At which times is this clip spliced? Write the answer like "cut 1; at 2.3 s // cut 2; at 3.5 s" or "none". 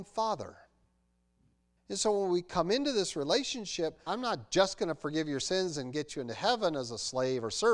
cut 1; at 1.8 s // cut 2; at 4.1 s